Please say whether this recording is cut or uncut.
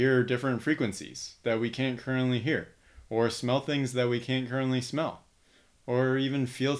uncut